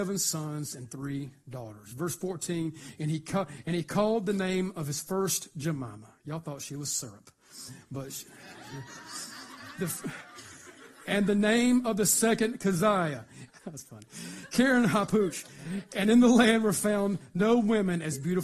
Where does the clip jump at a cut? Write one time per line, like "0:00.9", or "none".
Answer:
0:13.5